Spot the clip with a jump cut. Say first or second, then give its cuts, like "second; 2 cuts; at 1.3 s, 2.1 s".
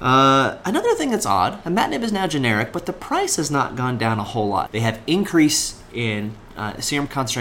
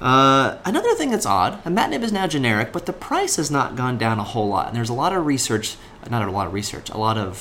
first; 1 cut; at 4.7 s